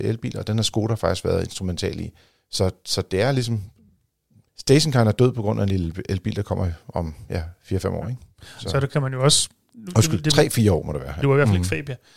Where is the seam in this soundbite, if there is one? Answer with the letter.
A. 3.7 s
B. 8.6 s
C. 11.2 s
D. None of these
C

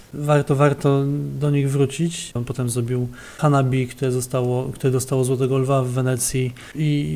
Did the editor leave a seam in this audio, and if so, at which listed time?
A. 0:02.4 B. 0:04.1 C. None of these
A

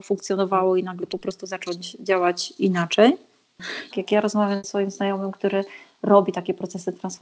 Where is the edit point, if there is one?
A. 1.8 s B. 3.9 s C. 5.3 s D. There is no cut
B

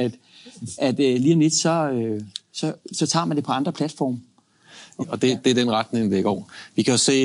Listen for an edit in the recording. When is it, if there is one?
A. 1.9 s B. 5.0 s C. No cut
B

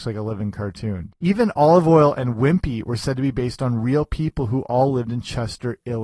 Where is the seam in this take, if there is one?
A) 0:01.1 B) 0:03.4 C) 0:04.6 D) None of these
A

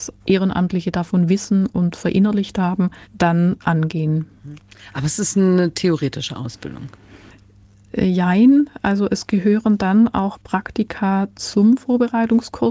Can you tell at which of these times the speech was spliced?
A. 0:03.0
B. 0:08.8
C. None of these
A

